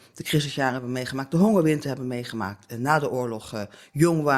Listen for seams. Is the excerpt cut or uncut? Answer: uncut